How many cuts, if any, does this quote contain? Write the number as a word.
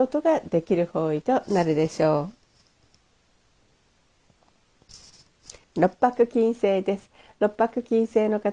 one